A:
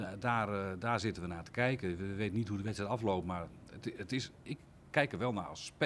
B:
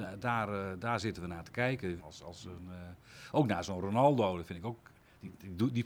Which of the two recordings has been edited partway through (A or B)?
B